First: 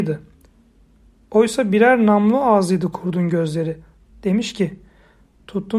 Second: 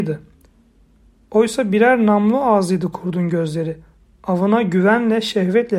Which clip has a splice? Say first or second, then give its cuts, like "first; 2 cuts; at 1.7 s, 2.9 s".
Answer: first; 1 cut; at 4.1 s